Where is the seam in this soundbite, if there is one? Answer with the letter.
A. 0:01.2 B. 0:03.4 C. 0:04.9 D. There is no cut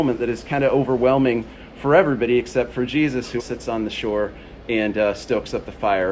B